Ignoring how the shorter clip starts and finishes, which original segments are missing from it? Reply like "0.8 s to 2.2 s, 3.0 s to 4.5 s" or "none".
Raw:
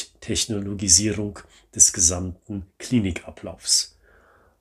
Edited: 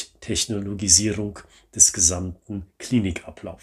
none